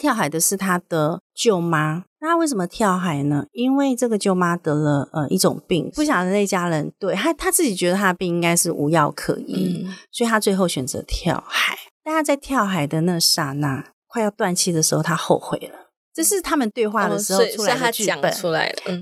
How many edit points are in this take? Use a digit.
1